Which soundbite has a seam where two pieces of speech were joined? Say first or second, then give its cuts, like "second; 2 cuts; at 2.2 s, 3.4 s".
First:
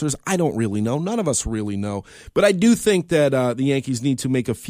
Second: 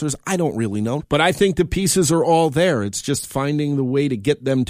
second; 1 cut; at 1.0 s